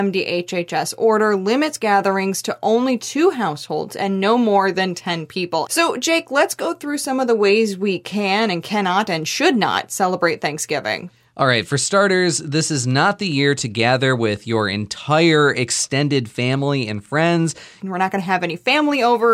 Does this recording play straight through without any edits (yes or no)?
no